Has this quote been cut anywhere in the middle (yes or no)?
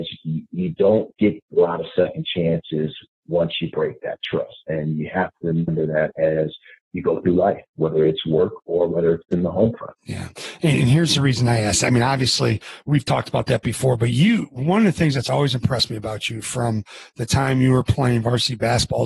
yes